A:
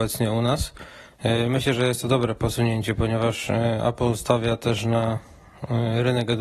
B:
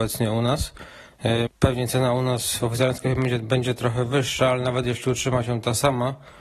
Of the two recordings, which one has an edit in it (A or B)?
B